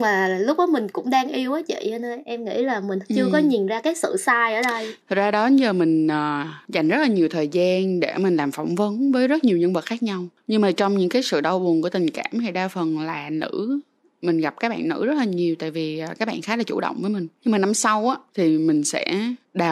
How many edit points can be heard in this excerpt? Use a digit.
1